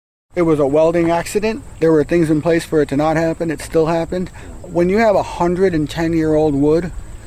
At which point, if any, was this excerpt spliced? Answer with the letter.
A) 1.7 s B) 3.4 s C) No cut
A